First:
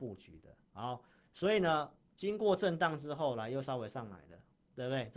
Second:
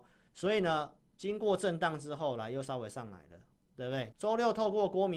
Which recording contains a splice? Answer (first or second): second